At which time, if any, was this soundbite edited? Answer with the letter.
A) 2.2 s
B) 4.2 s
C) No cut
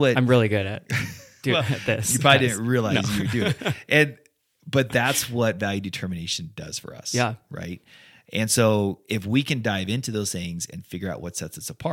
C